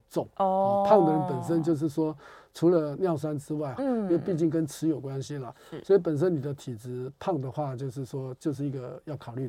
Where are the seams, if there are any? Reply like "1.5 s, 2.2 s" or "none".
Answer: 3.8 s